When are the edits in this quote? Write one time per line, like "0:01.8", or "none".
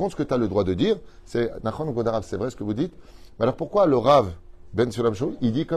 none